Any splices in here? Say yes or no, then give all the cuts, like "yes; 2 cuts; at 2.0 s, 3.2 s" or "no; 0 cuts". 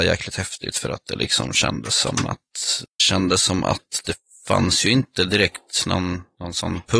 no; 0 cuts